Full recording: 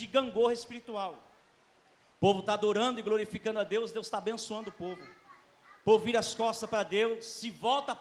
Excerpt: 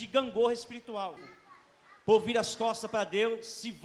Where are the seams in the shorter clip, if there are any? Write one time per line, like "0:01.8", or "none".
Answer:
0:01.2